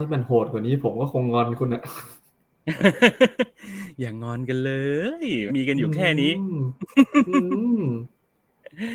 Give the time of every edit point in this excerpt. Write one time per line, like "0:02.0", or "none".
0:05.5